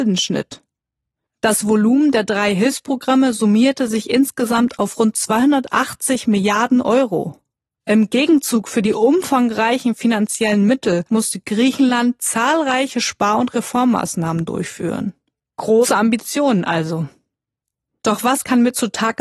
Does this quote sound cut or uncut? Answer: cut